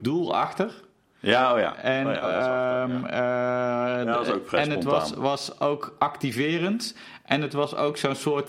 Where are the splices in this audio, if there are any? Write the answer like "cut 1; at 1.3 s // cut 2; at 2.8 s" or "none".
cut 1; at 2.2 s

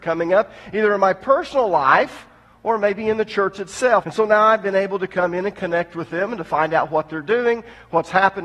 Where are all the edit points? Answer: cut 1; at 4.0 s

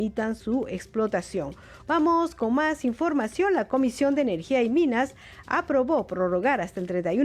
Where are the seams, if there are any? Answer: cut 1; at 1.8 s

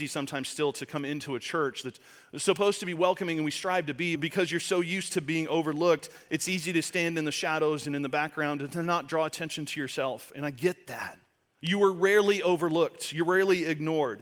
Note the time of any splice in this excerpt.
cut 1; at 4.2 s // cut 2; at 11.5 s

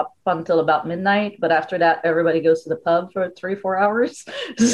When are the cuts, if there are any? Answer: none

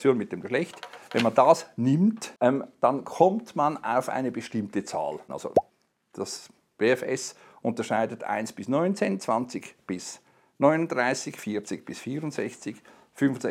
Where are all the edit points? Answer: cut 1; at 5.3 s

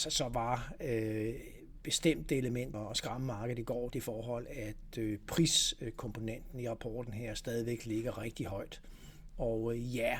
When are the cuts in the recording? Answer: cut 1; at 2.7 s // cut 2; at 3.9 s // cut 3; at 9.3 s

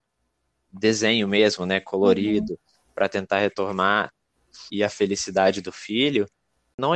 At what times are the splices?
cut 1; at 4.7 s

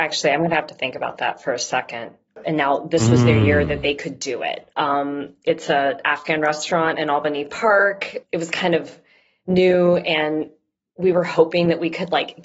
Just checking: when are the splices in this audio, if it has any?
cut 1; at 2.4 s // cut 2; at 4.7 s

